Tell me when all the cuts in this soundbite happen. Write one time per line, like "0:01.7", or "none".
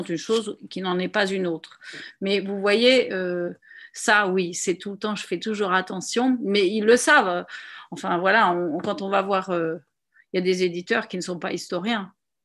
none